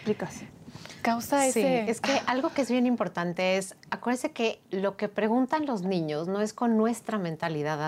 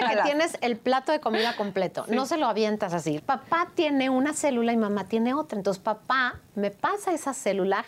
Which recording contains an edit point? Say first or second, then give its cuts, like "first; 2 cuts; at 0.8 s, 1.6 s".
second; 1 cut; at 3.2 s